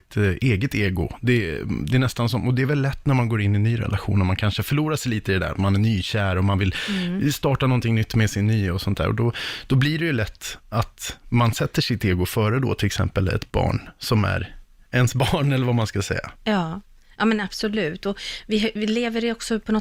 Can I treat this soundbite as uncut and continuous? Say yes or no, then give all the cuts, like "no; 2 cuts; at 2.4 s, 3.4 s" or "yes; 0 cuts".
yes; 0 cuts